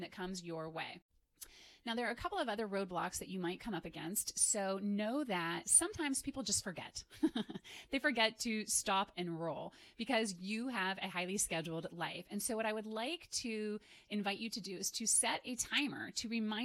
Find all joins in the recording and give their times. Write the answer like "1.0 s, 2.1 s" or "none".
9.1 s

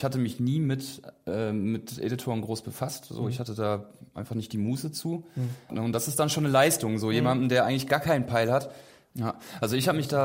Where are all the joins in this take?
5.7 s, 9.0 s

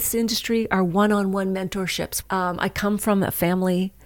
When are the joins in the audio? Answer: 2.2 s

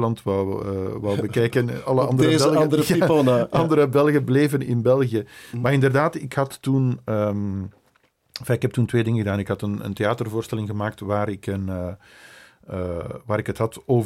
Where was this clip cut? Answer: none

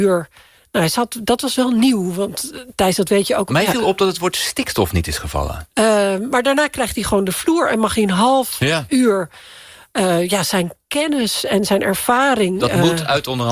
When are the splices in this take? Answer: 3.5 s, 5.7 s

